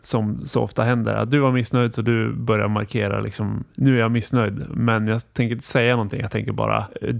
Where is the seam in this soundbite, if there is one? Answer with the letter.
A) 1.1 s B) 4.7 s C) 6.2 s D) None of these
D